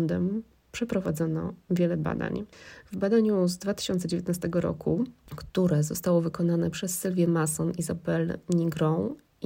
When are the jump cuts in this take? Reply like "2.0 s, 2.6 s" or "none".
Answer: none